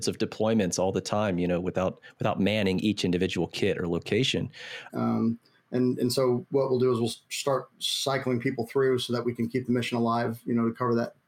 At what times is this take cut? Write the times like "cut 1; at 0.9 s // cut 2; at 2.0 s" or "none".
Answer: cut 1; at 4.9 s